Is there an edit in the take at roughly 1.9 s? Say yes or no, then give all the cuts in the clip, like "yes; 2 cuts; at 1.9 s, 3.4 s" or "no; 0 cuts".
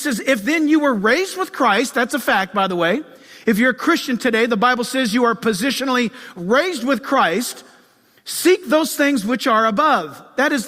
no; 0 cuts